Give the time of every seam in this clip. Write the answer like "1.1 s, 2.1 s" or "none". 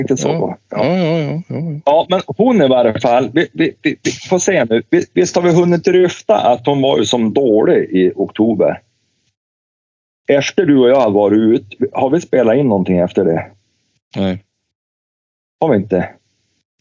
none